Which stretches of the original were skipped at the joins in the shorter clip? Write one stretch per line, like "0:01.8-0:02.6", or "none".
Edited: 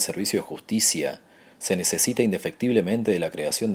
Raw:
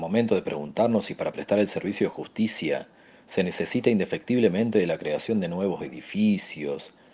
none